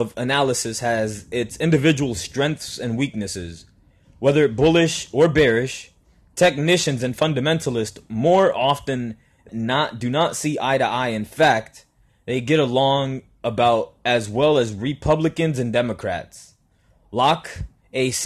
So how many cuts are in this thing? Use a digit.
1